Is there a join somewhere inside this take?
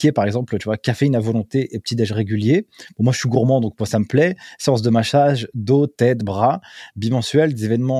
no; 0 cuts

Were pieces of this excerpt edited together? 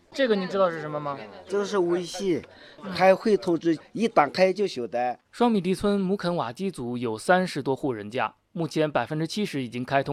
no; 0 cuts

